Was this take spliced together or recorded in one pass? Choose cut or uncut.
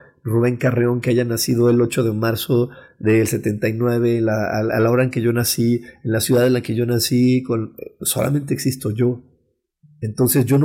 uncut